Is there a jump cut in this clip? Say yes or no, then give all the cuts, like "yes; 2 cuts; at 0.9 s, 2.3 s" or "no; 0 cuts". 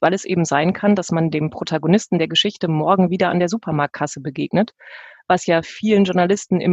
no; 0 cuts